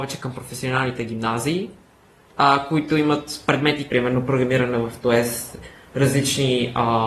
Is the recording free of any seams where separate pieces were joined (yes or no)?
no